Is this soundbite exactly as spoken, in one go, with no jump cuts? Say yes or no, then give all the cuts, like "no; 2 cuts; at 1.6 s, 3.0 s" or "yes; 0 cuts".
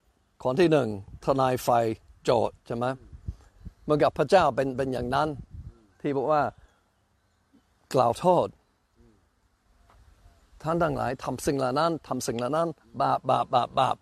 yes; 0 cuts